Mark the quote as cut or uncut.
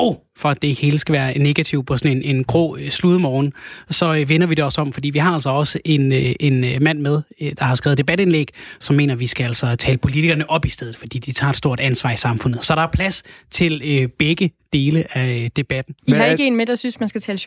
cut